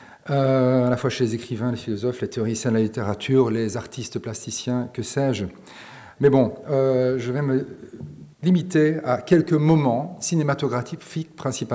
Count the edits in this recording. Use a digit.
2